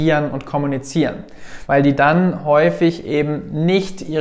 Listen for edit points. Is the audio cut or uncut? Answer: cut